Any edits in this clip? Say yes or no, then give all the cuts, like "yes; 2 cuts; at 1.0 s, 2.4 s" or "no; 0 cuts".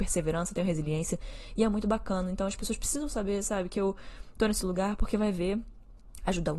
no; 0 cuts